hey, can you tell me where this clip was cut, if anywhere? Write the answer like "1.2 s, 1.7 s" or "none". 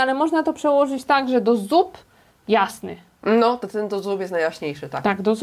none

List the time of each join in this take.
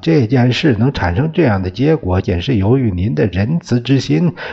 2.2 s

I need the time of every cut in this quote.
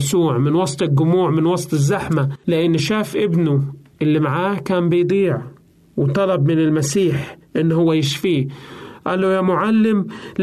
none

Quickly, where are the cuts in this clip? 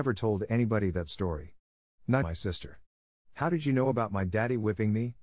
2.2 s

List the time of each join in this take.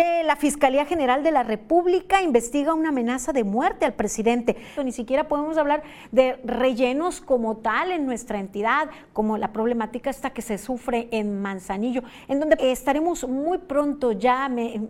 4.8 s, 12.6 s

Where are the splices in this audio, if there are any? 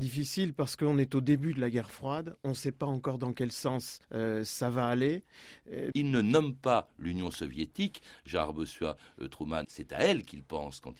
4.0 s, 5.9 s, 9.6 s

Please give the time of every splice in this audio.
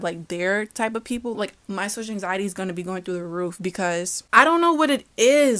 1.3 s

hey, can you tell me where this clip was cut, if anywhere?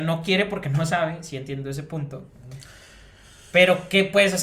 none

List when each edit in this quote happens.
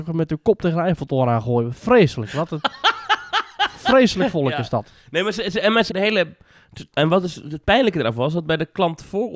5.9 s, 6.9 s

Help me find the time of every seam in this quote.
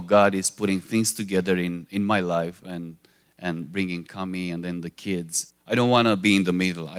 5.5 s

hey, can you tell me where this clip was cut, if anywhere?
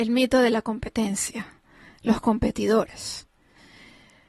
none

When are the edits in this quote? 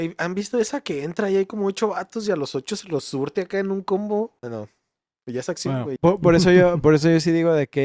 4.4 s, 6.0 s

